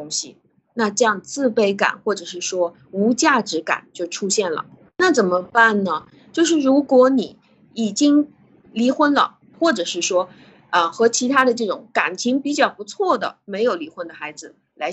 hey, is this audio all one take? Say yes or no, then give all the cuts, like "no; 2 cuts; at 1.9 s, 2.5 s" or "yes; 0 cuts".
no; 1 cut; at 9.5 s